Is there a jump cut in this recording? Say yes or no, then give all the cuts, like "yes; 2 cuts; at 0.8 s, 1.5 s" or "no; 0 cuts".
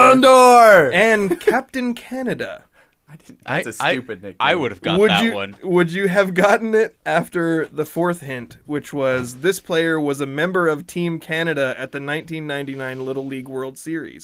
no; 0 cuts